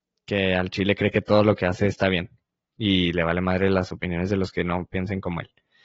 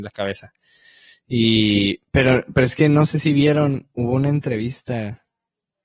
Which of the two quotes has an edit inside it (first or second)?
second